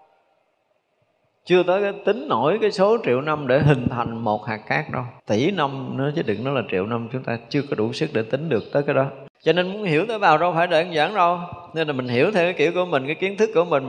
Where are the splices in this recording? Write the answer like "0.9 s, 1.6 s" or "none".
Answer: 5.2 s, 9.3 s

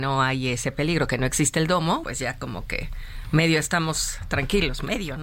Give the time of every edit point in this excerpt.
2.0 s

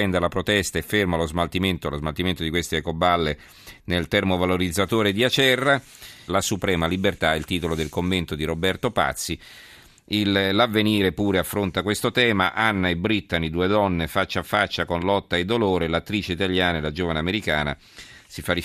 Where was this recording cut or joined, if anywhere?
6.3 s

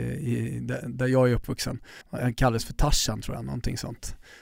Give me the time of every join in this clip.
2.0 s

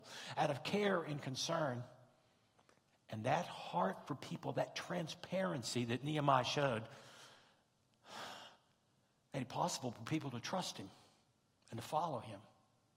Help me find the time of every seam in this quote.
none

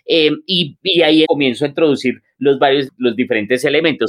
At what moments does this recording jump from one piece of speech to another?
1.2 s, 2.9 s

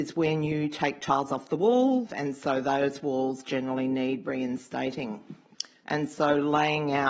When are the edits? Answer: 2.1 s, 5.8 s

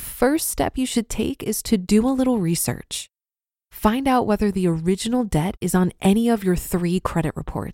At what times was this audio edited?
3.6 s

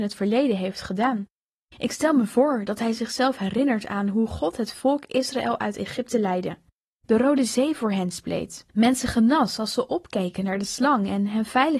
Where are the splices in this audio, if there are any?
6.8 s, 8.7 s

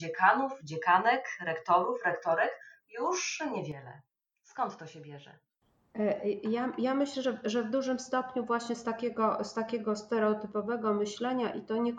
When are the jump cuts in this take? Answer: none

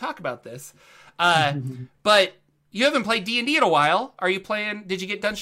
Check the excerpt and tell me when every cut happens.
none

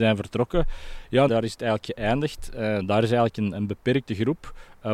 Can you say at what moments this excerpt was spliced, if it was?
1.3 s

